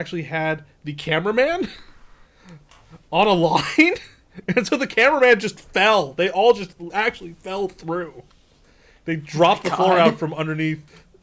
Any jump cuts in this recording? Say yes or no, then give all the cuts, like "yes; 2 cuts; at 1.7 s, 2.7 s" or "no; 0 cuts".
no; 0 cuts